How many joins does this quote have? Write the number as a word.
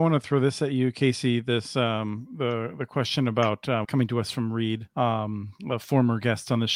two